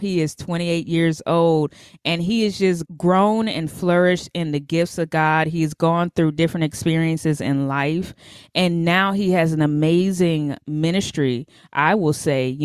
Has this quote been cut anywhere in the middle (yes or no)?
no